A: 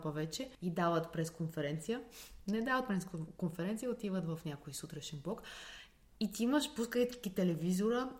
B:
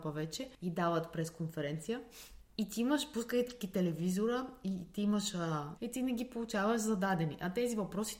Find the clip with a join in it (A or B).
B